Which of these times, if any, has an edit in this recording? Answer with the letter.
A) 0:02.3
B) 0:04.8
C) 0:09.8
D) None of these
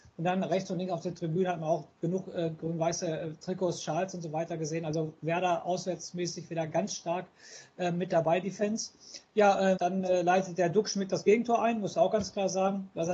C